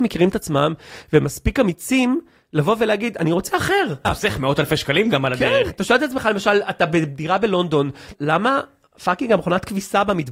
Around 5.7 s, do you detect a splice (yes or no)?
yes